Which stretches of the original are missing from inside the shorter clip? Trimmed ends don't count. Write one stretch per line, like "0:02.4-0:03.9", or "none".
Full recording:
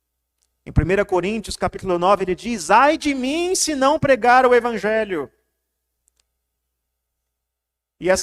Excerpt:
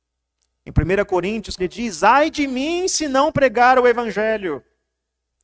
0:01.6-0:02.2

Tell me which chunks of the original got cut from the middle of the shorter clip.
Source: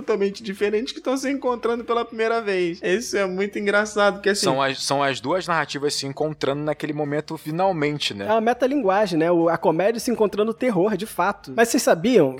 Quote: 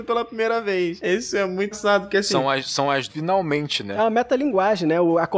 0:03.5-0:03.8
0:05.2-0:07.4

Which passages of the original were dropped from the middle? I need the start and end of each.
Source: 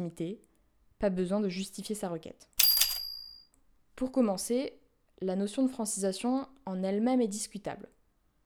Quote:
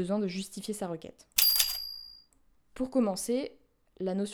none

